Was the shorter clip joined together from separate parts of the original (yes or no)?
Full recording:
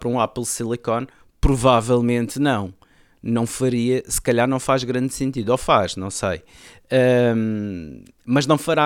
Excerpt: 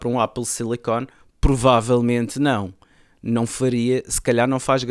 no